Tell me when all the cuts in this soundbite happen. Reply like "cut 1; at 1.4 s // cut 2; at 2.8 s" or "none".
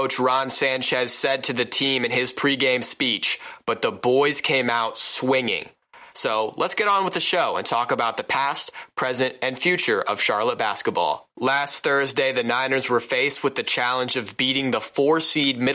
cut 1; at 6.1 s